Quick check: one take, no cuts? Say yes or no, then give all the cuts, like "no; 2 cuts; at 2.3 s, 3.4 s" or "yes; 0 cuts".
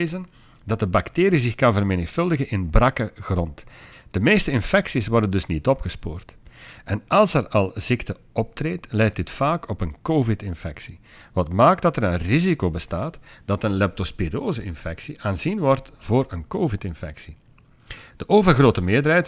no; 1 cut; at 3.9 s